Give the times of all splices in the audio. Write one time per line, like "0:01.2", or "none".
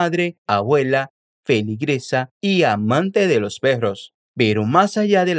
0:04.2